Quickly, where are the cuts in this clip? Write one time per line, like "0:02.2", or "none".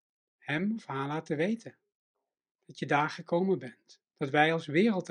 none